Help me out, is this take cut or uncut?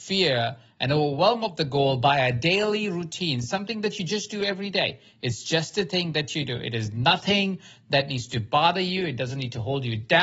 uncut